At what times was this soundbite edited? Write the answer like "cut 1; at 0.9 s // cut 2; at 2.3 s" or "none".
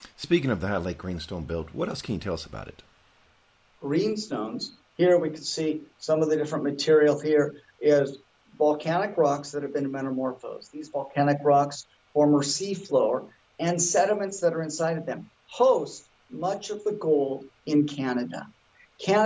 cut 1; at 3.7 s